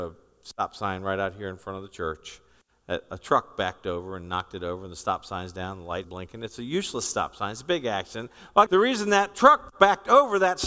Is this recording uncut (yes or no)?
no